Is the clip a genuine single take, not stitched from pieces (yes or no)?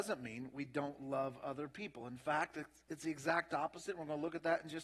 yes